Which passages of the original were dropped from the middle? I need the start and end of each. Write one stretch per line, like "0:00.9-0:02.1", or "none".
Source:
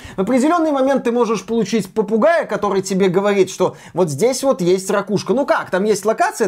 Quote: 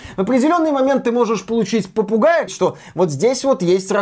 0:02.5-0:03.5